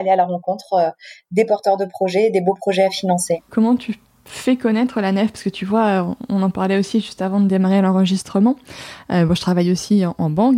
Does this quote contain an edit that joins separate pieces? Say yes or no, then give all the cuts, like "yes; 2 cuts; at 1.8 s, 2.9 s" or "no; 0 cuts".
no; 0 cuts